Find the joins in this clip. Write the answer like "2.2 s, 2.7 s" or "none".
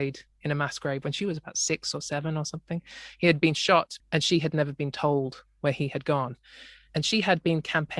4.0 s, 6.9 s